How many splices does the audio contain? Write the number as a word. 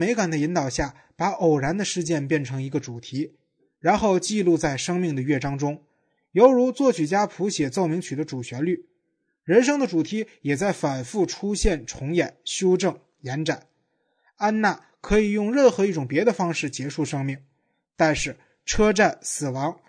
zero